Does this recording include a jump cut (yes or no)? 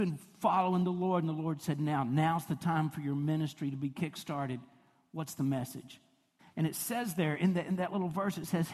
yes